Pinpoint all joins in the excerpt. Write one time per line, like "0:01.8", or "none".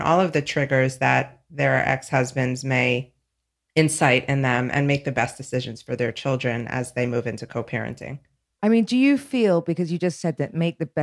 none